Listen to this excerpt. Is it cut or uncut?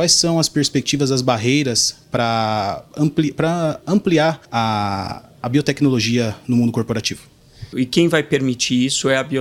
cut